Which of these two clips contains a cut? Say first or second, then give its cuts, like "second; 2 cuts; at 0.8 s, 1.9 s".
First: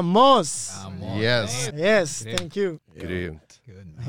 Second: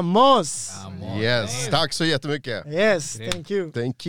first; 2 cuts; at 1.7 s, 2.8 s